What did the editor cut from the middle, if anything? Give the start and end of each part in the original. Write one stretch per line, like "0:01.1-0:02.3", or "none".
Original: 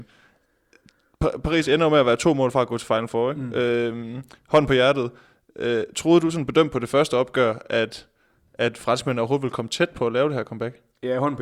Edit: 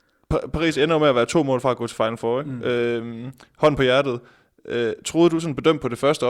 none